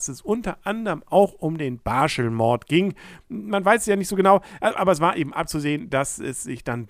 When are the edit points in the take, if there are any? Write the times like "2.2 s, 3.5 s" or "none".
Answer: 3.2 s